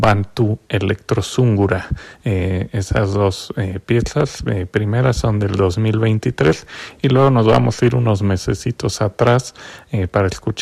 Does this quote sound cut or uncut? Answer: uncut